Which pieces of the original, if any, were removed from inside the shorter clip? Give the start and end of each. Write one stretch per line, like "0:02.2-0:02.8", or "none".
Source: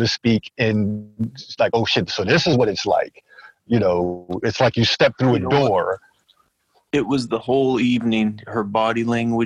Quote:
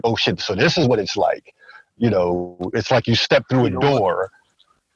none